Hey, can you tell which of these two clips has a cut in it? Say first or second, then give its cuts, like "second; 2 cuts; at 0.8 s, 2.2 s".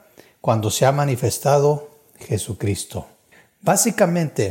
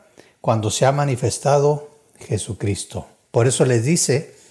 second; 1 cut; at 3.2 s